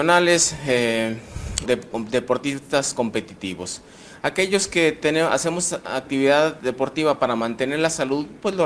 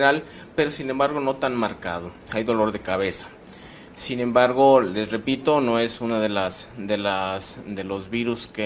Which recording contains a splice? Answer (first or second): first